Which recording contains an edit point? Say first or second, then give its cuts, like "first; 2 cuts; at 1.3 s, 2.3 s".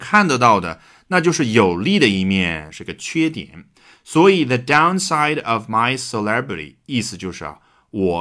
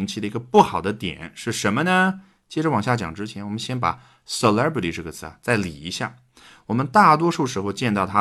first; 1 cut; at 2.7 s